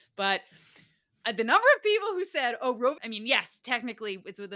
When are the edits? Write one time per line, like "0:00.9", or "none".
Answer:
0:03.0